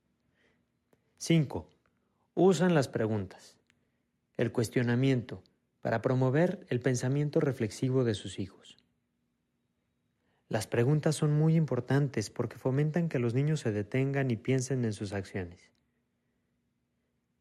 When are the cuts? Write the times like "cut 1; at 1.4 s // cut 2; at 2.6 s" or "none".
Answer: none